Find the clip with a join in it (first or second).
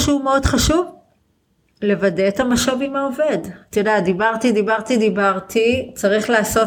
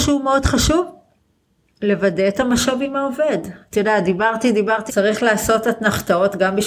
second